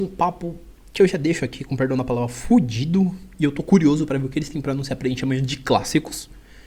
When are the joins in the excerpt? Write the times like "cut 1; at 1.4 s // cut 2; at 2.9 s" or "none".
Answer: none